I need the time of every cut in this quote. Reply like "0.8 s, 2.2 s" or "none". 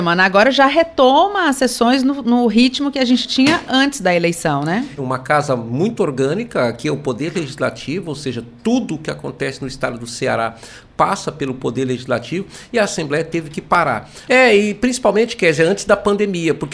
5.0 s, 14.3 s